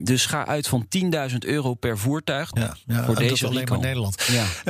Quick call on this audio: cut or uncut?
cut